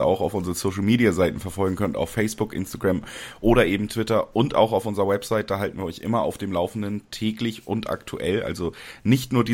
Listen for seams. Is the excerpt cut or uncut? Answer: uncut